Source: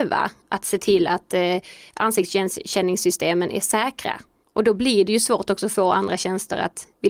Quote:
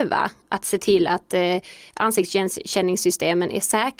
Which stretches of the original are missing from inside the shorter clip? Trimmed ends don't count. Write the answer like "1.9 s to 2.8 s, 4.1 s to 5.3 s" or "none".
none